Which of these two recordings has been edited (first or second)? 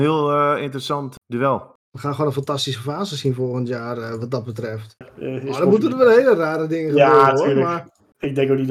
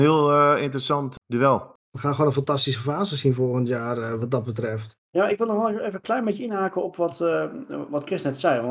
first